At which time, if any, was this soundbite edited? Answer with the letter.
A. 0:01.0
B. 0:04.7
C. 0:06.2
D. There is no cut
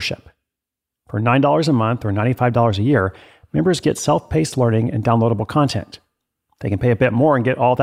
D